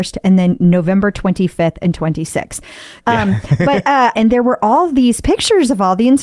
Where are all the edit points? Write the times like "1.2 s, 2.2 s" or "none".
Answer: 3.0 s, 4.1 s